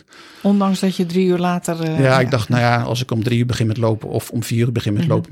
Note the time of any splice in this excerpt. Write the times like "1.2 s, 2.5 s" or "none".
none